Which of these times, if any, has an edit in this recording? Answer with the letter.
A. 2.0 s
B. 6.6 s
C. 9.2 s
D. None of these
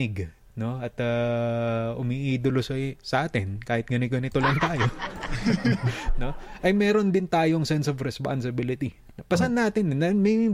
D